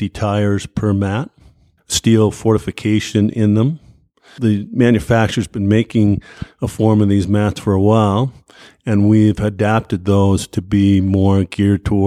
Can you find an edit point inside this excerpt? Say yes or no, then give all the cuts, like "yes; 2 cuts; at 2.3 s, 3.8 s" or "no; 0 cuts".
no; 0 cuts